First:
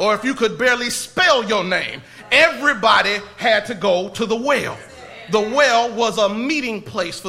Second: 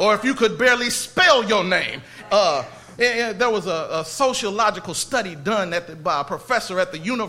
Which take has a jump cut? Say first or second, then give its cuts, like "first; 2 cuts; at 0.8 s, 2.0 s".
second; 1 cut; at 2.3 s